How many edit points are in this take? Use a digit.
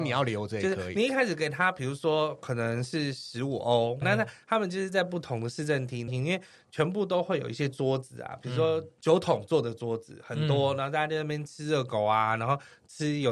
2